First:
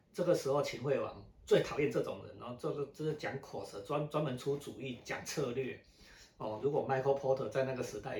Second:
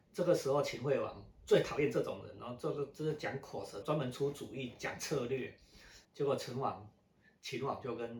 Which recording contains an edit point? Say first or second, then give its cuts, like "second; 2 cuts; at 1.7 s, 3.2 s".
second; 2 cuts; at 3.8 s, 6.0 s